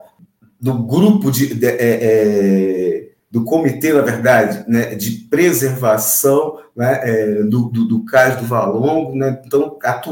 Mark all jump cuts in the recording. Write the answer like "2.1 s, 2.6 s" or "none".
none